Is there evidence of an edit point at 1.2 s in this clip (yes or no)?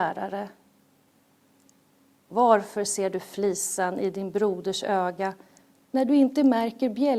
no